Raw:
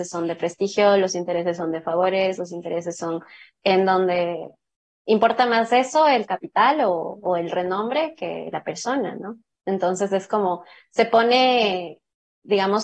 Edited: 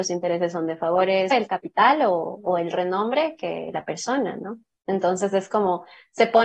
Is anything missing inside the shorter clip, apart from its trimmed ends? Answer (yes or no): yes